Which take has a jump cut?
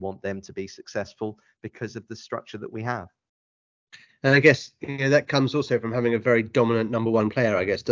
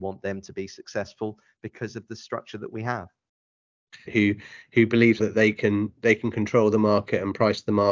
second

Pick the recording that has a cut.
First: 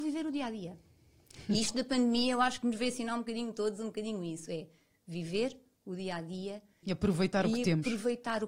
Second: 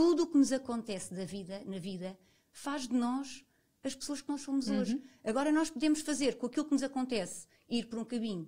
first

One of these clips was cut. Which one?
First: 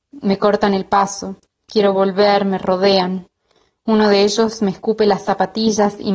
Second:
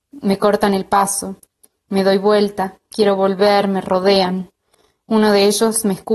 first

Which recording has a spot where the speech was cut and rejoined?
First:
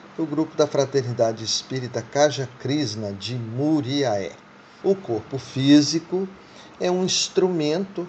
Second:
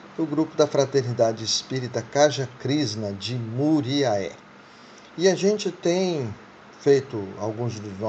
first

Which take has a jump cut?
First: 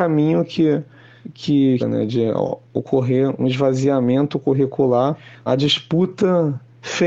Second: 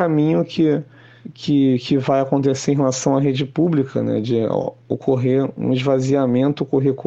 first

